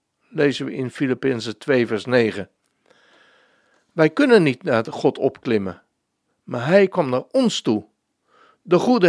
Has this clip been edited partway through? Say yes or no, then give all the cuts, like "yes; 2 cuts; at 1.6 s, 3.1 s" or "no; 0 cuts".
no; 0 cuts